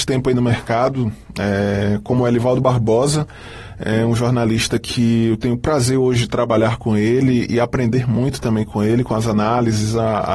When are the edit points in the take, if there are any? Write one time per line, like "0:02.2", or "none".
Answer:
none

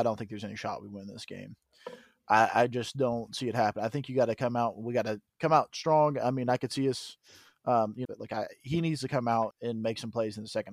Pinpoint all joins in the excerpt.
0:08.1
0:09.5

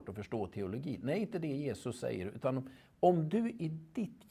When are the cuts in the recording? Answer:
none

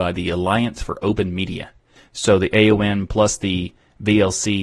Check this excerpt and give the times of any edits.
0:02.0

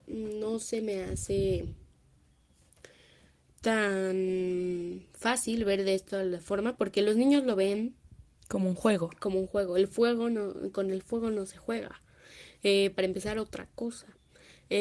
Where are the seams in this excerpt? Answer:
none

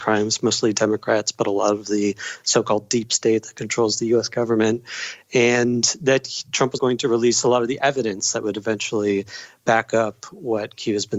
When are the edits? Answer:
0:06.8

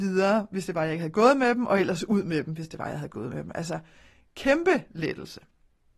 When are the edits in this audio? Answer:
none

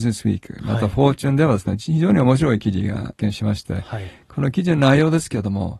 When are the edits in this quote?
none

